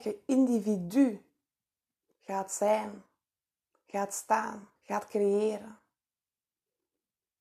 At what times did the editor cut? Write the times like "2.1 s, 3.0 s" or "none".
2.1 s, 4.8 s